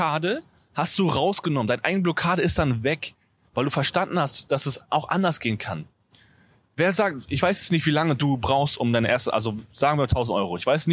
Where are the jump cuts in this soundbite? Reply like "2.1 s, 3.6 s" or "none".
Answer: none